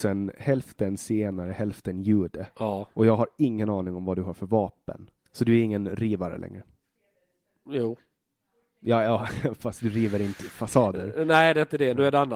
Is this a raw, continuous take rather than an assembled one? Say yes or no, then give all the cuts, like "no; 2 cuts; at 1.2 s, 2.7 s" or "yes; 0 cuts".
no; 1 cut; at 5.2 s